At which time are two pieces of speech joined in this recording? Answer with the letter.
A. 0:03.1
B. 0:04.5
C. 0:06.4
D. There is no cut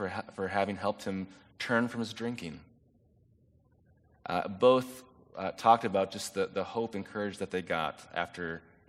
D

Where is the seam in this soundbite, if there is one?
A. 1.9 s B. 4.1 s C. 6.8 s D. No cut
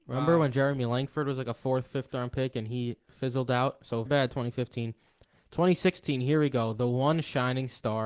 B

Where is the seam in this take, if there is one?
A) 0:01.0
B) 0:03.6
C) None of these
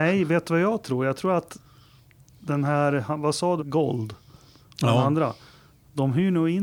B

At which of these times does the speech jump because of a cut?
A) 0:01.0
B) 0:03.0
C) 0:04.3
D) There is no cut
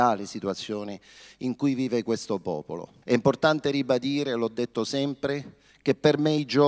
B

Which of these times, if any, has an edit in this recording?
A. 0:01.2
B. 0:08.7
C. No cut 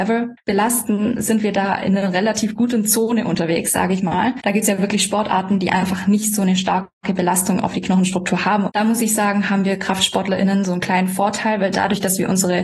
B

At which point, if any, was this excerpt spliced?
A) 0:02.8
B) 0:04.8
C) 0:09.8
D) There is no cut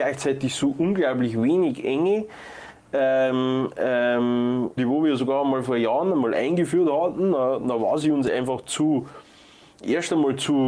B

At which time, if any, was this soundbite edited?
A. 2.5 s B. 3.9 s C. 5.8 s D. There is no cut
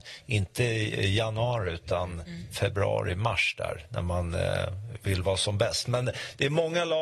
D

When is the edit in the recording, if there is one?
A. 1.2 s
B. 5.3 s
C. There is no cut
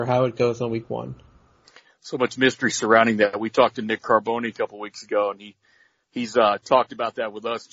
C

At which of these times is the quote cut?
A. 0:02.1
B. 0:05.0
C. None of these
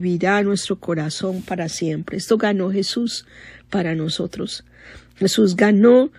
C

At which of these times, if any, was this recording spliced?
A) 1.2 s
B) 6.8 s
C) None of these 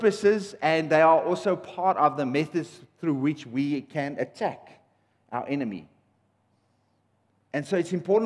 C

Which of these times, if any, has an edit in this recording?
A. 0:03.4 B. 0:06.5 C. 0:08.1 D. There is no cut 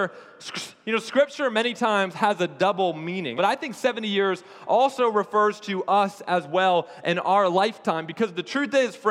A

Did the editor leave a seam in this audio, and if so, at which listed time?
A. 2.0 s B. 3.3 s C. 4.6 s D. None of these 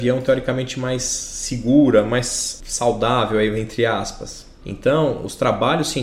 C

